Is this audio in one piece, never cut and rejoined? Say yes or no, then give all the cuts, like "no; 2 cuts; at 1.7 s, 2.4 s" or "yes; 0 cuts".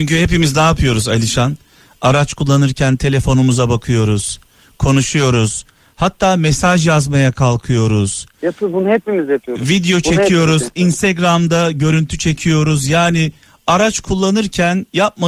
yes; 0 cuts